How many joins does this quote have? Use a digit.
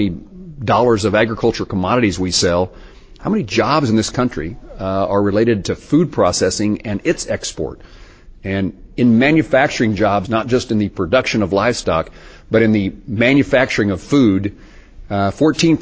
1